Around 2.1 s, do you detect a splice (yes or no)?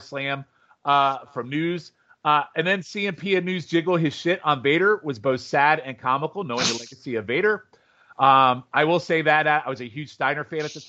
no